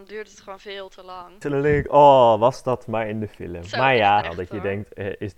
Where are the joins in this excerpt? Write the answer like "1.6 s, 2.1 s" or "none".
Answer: 1.4 s, 4.2 s